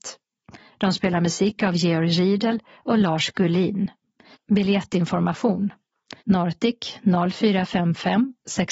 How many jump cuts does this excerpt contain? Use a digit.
2